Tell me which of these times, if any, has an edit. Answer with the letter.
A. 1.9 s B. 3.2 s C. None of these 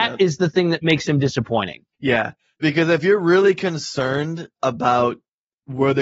A